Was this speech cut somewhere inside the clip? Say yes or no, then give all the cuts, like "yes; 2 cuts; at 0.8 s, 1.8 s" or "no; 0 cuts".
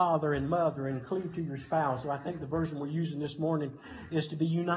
no; 0 cuts